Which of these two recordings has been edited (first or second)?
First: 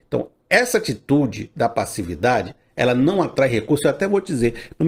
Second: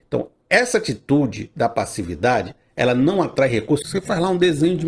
second